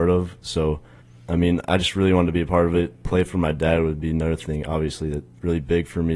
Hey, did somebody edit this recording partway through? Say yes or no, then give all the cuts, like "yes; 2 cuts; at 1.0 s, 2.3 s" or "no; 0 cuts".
no; 0 cuts